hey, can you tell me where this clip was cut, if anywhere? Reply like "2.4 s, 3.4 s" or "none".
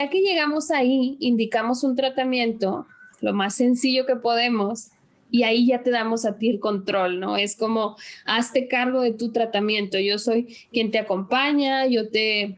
none